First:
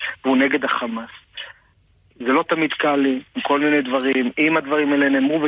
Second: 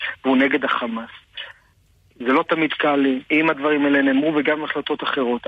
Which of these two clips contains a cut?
second; 1 cut; at 3.3 s

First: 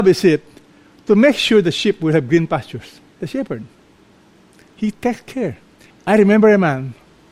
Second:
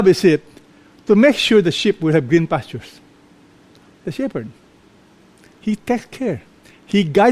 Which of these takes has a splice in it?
first; 2 cuts; at 3.1 s, 5.9 s

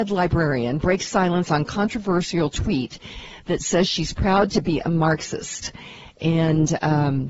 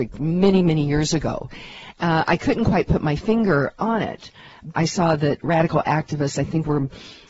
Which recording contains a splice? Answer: second; 1 cut; at 4.7 s

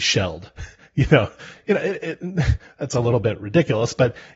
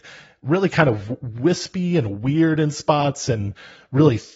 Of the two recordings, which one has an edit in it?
first; 1 cut; at 1.5 s

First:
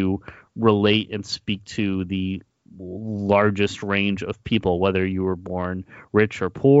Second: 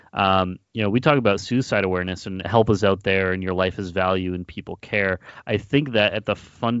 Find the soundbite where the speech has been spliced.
second; 1 cut; at 2.4 s

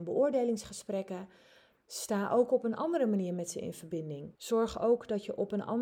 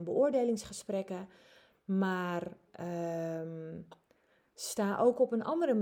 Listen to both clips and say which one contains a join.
first; 2 cuts; at 1.8 s, 4.3 s

